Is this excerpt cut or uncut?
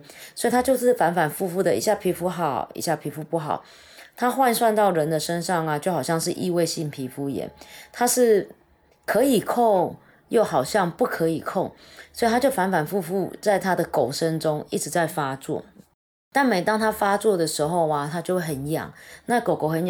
uncut